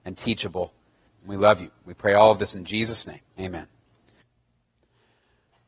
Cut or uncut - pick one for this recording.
cut